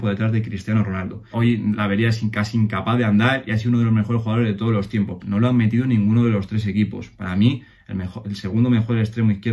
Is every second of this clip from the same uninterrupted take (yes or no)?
no